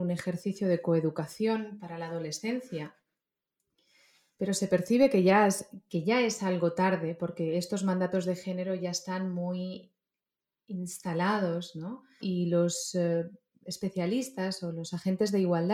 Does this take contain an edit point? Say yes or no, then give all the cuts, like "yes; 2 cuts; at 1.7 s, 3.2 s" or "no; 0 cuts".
yes; 1 cut; at 12.2 s